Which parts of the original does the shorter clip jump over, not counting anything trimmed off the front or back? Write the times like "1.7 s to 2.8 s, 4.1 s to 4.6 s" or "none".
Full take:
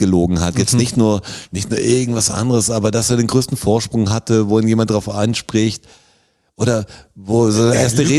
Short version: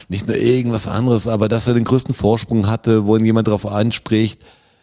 none